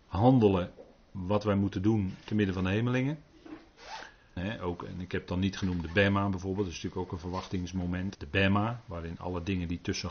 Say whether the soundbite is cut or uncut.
cut